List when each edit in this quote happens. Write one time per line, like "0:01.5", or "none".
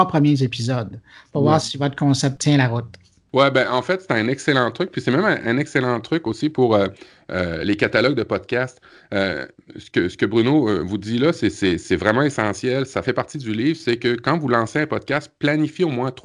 none